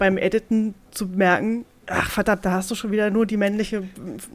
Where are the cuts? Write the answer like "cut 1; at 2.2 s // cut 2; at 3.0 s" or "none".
none